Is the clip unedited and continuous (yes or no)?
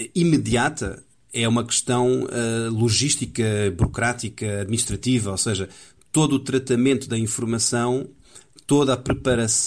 yes